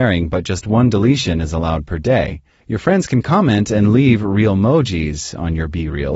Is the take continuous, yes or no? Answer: no